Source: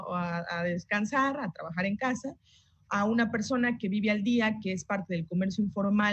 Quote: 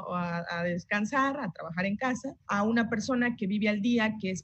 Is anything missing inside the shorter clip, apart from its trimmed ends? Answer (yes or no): yes